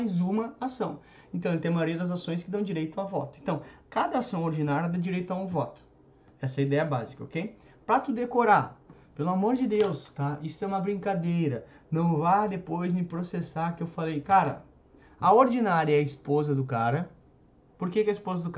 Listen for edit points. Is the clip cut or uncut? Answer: uncut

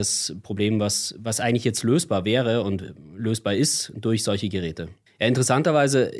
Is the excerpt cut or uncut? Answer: cut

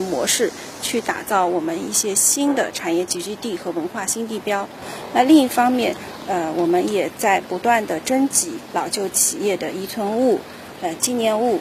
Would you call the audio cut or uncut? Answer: uncut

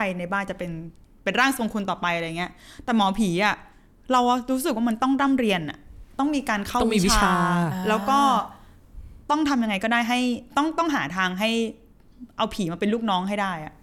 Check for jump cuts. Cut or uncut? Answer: uncut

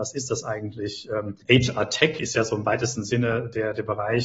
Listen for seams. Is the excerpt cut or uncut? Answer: cut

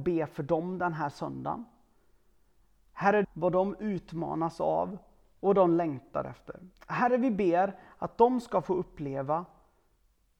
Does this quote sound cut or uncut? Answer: cut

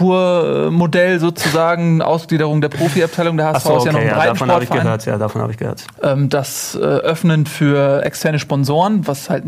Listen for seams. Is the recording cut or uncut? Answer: cut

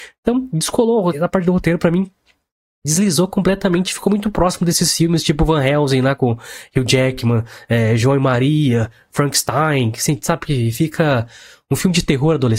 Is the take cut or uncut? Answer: cut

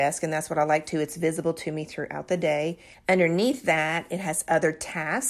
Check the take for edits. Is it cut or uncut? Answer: cut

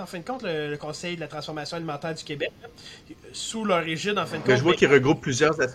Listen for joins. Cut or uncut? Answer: uncut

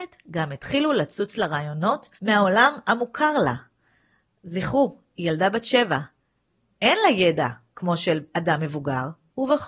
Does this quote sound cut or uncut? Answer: cut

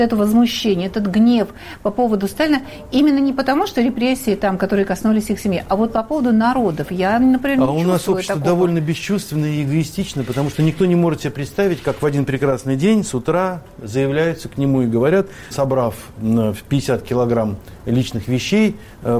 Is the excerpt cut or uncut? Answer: cut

